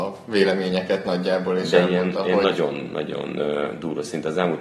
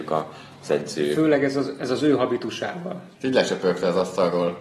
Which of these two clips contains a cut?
second; 1 cut; at 3.1 s

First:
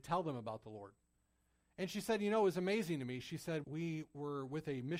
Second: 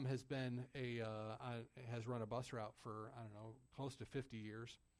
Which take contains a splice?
first; 1 cut; at 3.6 s

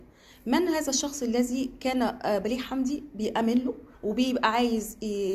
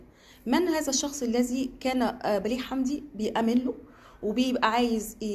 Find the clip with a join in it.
first; 1 cut; at 3.9 s

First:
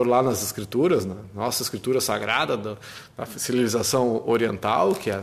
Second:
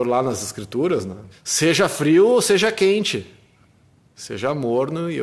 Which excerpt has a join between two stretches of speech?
second; 1 cut; at 1.3 s

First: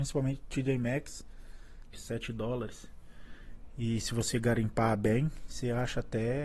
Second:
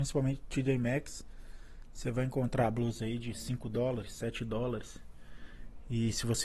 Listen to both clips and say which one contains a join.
first; 1 cut; at 1.9 s

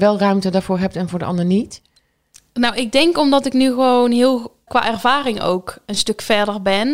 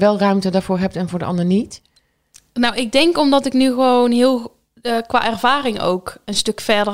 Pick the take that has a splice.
first; 1 cut; at 4.7 s

